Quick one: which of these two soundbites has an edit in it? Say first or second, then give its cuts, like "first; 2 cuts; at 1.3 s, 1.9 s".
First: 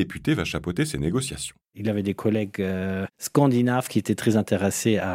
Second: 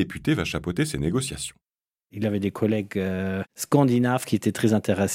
first; 1 cut; at 1.6 s